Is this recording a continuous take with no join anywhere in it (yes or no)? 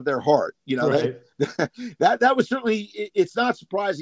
yes